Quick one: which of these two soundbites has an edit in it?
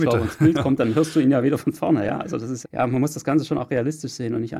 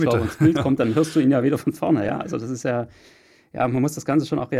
first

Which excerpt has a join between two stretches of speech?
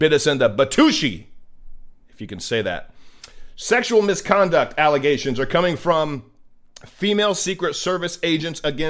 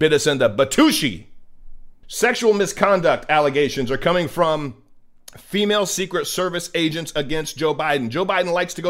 second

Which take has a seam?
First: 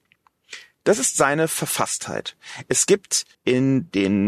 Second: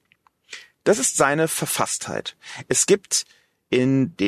first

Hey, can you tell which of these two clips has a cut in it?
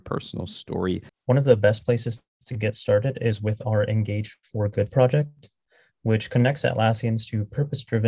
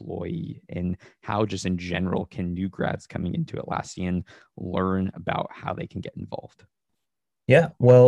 first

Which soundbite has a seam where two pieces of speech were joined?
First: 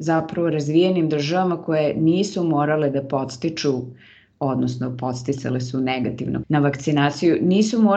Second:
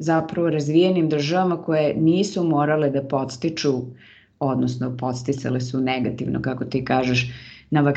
first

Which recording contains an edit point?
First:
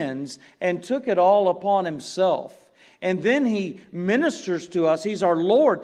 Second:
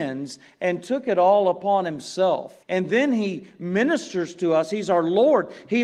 second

